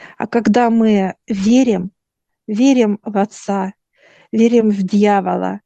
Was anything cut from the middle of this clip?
no; 0 cuts

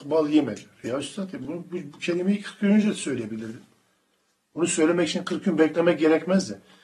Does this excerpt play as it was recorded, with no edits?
yes; 0 cuts

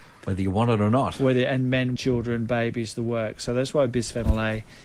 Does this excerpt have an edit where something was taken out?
yes; 1 cut; at 2.0 s

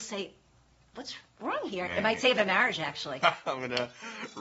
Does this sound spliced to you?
yes; 1 cut; at 1.9 s

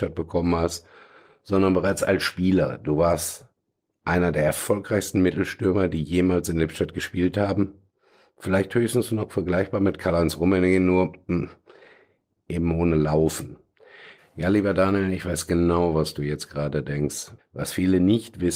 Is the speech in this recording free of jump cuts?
no; 2 cuts; at 14.2 s, 17.4 s

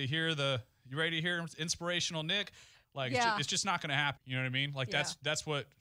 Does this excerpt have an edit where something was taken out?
yes; 2 cuts; at 2.8 s, 4.2 s

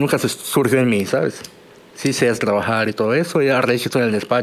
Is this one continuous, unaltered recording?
yes; 0 cuts

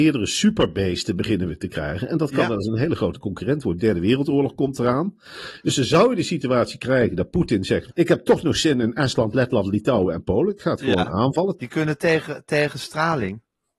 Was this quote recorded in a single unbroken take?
no; 2 cuts; at 7.9 s, 11.6 s

